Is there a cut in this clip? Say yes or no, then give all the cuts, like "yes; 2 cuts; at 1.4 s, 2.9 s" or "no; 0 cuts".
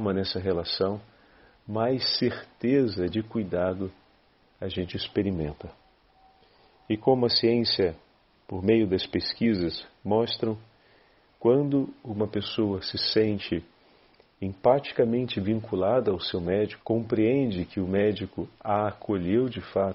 yes; 1 cut; at 16.8 s